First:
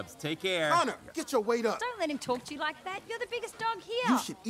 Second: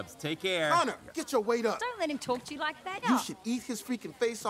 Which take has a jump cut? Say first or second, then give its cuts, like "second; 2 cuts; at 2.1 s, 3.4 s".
second; 1 cut; at 3.0 s